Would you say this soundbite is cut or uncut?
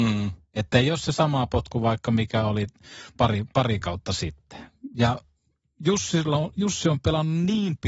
uncut